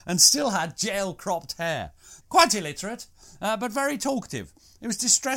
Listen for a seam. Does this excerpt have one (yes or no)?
yes